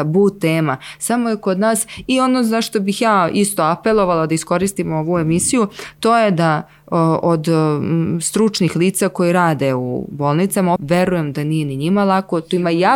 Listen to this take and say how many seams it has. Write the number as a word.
one